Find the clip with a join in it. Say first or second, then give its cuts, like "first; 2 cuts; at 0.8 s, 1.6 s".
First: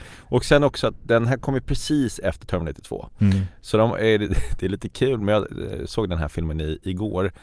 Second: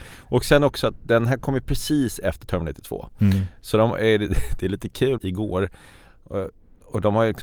second; 1 cut; at 5.2 s